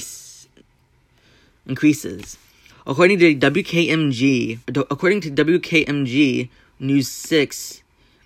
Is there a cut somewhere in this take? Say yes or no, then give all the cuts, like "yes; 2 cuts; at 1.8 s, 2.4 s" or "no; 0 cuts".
yes; 2 cuts; at 2.7 s, 4.6 s